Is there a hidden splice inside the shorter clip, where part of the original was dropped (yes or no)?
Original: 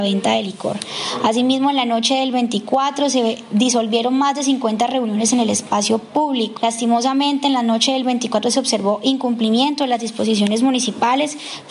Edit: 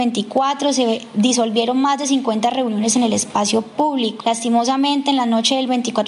no